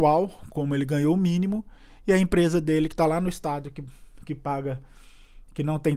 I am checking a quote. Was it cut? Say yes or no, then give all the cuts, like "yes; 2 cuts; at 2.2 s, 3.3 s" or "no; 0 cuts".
no; 0 cuts